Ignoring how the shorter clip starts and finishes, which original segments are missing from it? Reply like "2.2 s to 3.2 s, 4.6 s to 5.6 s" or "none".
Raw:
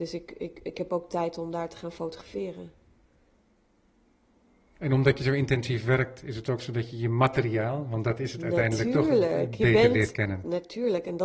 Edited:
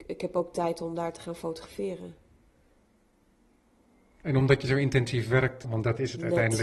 6.2 s to 7.8 s